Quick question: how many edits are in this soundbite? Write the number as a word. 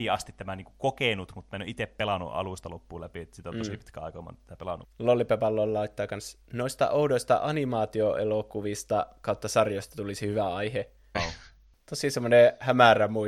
two